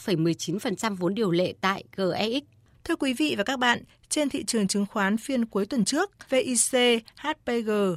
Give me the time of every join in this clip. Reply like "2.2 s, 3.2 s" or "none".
2.7 s, 6.2 s